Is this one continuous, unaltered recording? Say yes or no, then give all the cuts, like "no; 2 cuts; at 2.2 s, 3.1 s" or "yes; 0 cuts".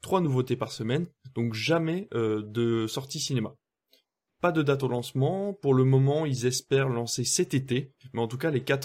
yes; 0 cuts